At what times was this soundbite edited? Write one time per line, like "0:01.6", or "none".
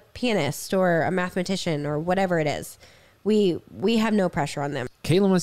none

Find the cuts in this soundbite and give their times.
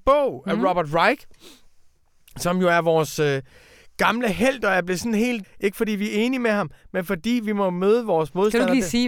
0:05.4

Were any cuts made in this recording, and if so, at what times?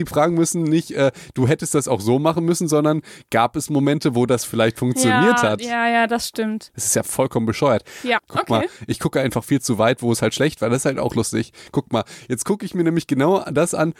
0:06.7
0:08.2

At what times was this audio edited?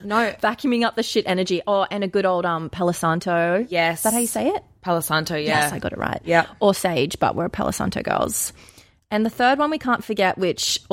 none

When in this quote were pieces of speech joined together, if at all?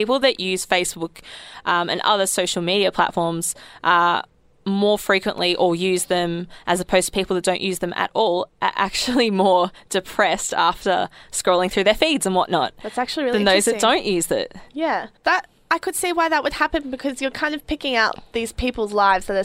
0:15.2

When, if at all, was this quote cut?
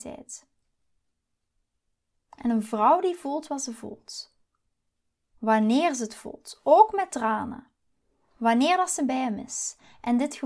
none

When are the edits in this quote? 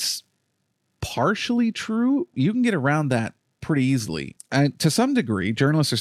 0:02.3
0:04.4

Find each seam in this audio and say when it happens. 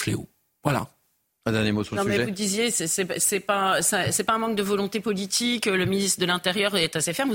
none

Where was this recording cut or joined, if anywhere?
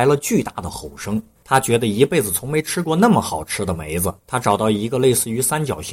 0:01.4
0:04.2

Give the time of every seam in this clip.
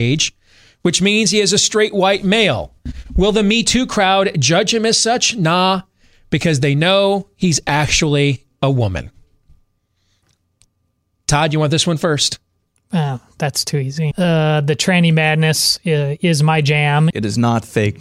0:14.1
0:17.1

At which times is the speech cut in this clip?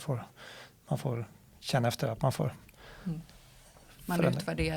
none

